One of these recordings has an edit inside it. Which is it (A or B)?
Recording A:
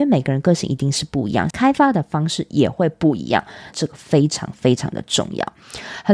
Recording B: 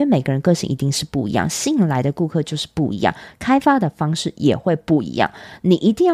A